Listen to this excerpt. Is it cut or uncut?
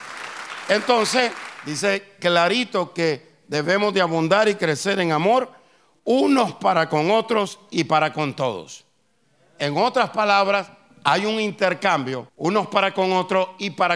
cut